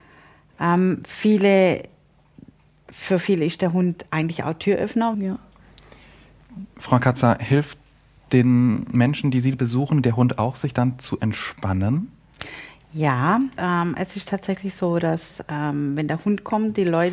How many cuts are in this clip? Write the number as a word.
two